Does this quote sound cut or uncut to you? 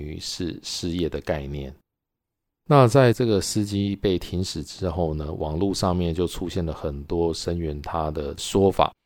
uncut